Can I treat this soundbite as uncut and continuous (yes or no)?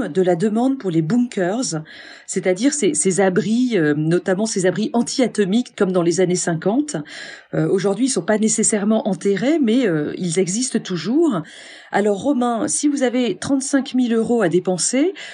yes